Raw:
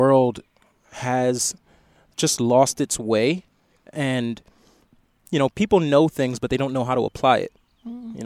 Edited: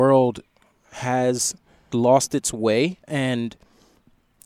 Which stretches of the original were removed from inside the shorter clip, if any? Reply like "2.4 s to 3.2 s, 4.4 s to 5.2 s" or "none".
1.9 s to 2.4 s, 3.5 s to 3.9 s